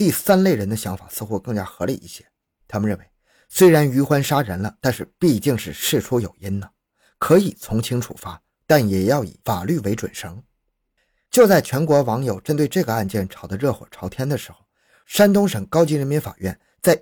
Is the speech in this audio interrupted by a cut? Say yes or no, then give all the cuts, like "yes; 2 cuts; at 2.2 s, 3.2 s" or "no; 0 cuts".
no; 0 cuts